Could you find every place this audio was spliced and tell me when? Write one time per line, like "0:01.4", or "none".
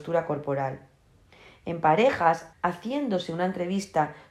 0:02.5